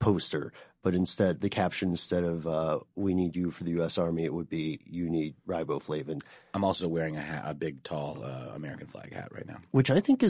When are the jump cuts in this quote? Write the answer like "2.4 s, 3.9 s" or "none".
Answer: none